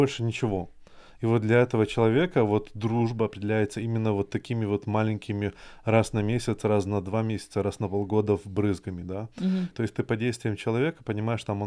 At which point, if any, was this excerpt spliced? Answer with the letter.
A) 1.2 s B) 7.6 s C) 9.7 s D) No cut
C